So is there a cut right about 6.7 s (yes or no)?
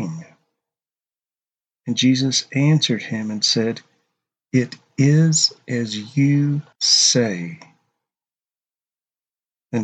yes